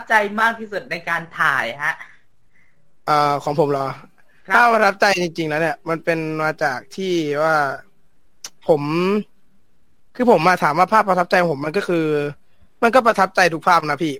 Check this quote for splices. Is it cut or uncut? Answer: uncut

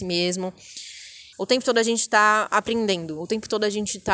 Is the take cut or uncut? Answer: cut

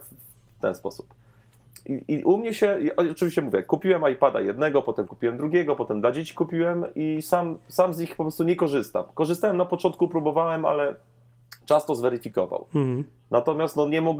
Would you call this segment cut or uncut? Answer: uncut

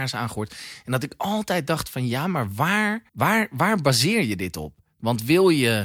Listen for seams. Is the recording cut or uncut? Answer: cut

